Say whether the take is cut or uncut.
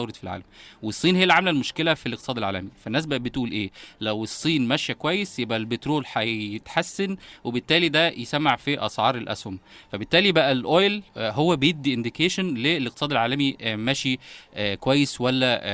cut